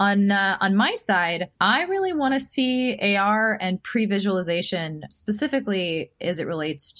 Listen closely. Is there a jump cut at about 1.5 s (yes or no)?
yes